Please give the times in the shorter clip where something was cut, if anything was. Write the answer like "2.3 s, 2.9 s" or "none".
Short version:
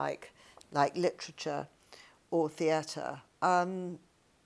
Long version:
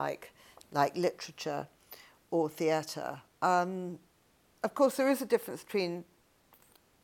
none